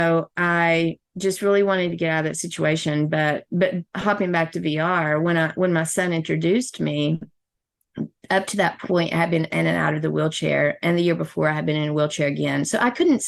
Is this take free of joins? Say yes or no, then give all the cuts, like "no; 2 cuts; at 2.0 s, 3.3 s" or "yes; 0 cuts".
yes; 0 cuts